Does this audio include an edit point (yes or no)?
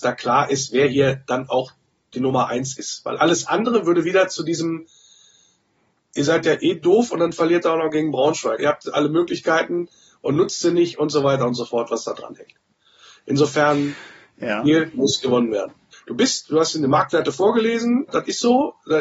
yes